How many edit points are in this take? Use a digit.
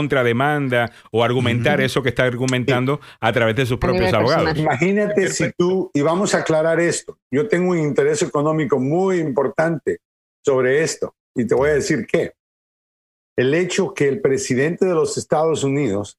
1